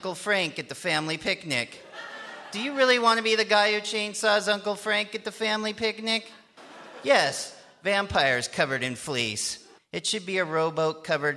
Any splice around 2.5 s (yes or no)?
no